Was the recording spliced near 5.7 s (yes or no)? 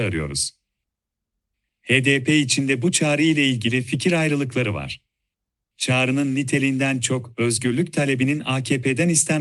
yes